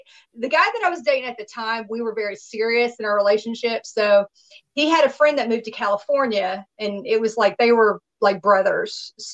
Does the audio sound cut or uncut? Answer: uncut